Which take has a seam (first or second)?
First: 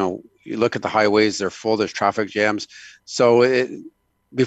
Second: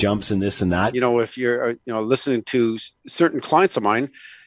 second